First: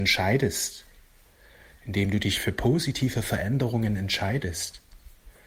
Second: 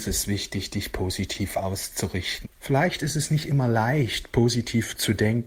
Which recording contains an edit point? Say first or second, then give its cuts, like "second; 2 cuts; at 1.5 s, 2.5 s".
second; 1 cut; at 2.4 s